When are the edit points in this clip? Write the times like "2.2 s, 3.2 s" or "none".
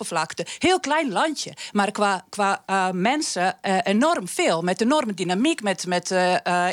none